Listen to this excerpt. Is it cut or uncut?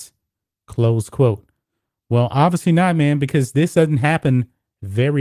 uncut